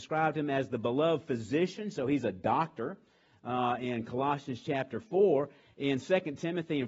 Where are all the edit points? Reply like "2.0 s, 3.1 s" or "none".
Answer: none